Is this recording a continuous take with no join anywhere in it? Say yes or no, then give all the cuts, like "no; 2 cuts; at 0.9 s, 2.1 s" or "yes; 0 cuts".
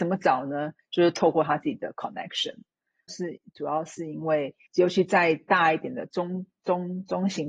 no; 2 cuts; at 3.1 s, 4.7 s